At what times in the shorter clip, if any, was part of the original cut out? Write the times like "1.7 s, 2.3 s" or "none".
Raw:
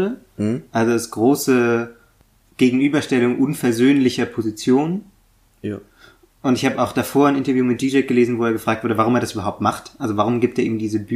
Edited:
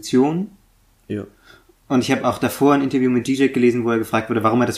none

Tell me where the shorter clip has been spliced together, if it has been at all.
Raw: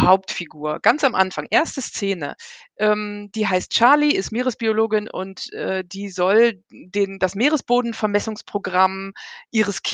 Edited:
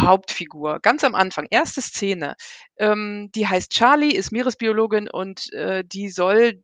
none

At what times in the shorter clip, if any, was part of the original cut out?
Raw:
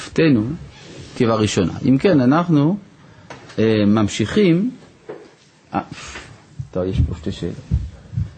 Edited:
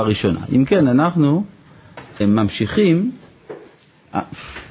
2.2 s

